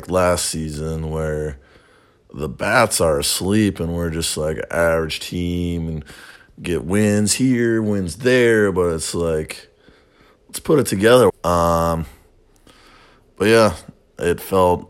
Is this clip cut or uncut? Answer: cut